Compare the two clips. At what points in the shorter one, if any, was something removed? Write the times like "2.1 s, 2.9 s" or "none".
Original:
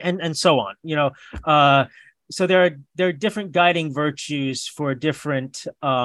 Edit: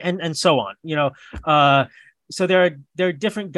none